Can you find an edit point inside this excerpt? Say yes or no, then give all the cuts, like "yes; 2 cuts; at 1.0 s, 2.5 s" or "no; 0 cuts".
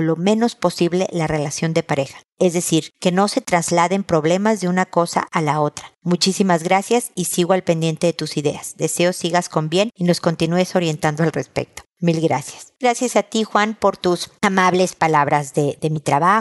no; 0 cuts